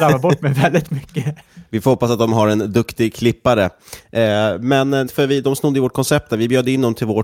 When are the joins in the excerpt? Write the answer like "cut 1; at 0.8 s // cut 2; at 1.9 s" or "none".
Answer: cut 1; at 5.1 s